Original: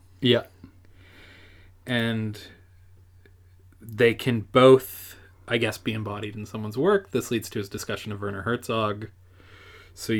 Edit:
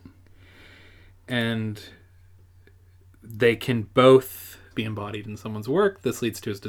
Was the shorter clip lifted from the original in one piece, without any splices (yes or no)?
no